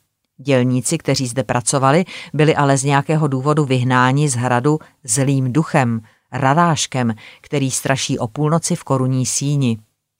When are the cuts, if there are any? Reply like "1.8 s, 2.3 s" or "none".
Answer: none